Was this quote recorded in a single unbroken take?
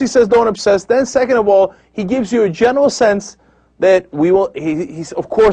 yes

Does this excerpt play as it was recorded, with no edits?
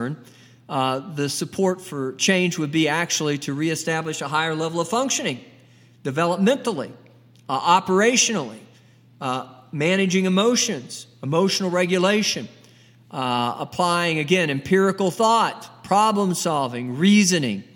yes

